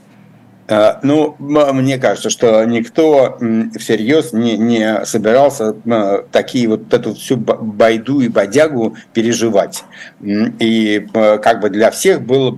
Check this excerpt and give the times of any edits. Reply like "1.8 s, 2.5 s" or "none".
6.9 s

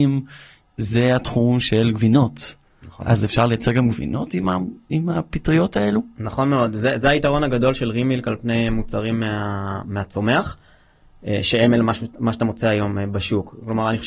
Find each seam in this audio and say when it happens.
none

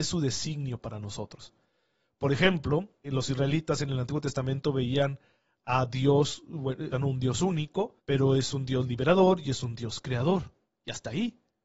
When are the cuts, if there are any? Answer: 3.0 s, 6.9 s, 8.0 s

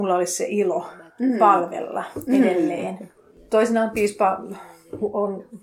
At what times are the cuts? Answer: none

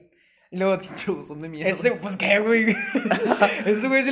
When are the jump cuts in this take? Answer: none

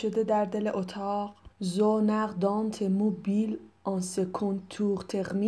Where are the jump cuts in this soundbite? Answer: 1.5 s

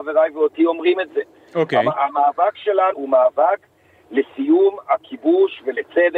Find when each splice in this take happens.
2.9 s

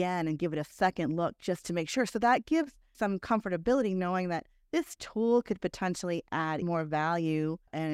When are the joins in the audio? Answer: 2.9 s, 6.6 s

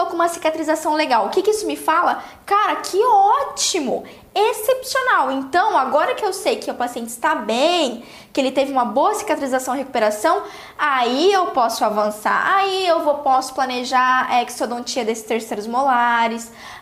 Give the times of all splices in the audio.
none

